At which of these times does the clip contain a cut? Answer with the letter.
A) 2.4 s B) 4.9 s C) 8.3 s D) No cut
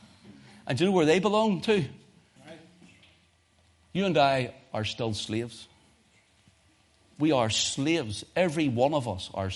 A